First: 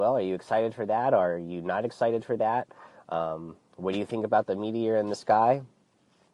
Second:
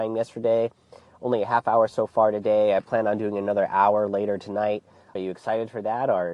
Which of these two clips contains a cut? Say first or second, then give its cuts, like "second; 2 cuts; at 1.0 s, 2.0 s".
second; 1 cut; at 5.2 s